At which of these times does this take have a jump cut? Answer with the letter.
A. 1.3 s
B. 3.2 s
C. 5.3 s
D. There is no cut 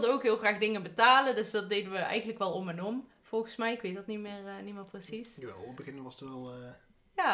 D